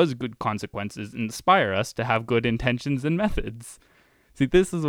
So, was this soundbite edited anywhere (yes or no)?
no